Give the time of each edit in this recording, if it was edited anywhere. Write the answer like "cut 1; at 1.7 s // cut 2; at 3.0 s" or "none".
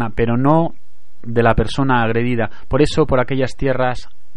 none

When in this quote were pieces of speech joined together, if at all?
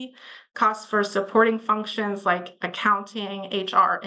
none

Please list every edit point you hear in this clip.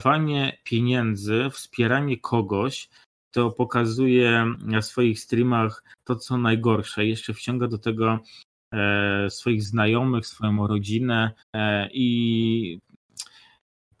cut 1; at 11.4 s

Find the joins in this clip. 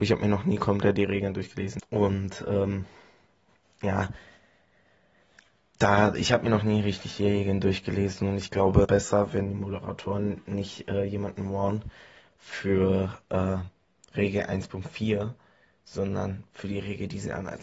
cut 1; at 1.8 s // cut 2; at 8.8 s

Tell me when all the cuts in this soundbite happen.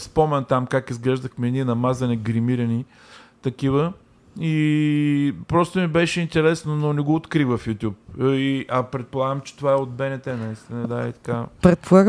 none

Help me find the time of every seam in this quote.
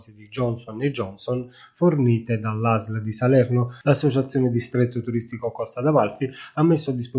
cut 1; at 3.8 s

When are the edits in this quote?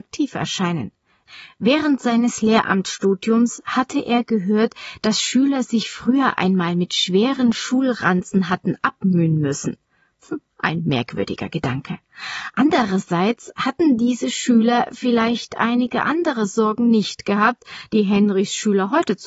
none

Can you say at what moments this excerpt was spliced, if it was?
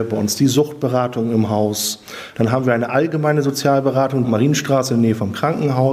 cut 1; at 2.3 s // cut 2; at 4.2 s

